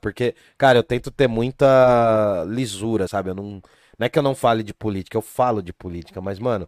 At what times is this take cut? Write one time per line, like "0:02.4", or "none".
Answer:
0:03.1